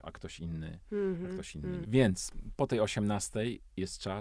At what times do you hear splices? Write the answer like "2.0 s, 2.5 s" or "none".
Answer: 1.8 s

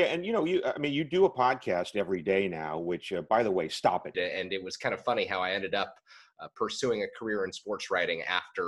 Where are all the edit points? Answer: 4.1 s

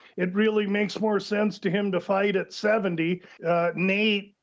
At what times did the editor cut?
3.4 s

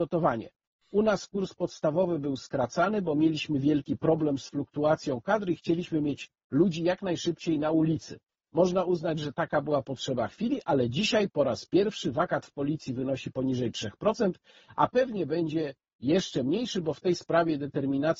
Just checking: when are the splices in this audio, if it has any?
none

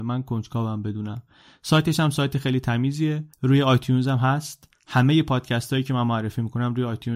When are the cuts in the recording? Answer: 3.3 s

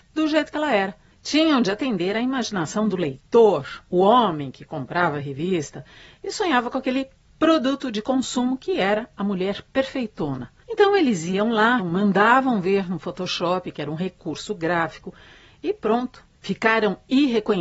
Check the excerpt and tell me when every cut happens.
11.8 s

